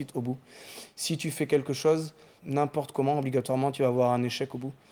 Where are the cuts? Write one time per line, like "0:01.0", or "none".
0:02.4